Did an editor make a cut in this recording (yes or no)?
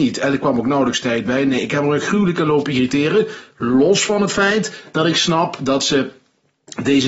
no